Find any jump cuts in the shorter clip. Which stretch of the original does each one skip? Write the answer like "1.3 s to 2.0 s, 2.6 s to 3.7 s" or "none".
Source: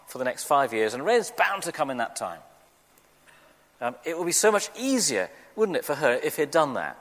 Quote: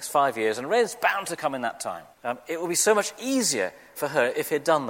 2.5 s to 3.7 s, 5.5 s to 5.8 s